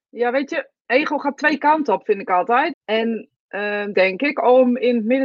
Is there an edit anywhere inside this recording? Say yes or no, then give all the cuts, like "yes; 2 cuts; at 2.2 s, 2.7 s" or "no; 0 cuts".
yes; 2 cuts; at 2.7 s, 3.9 s